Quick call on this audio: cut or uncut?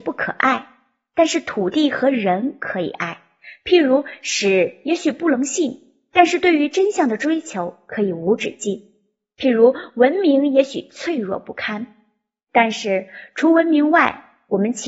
uncut